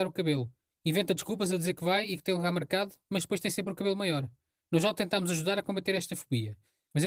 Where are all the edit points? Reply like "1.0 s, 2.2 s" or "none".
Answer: none